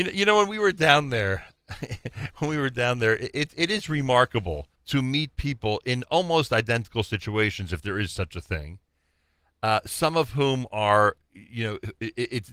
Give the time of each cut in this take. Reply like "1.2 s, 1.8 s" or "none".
4.8 s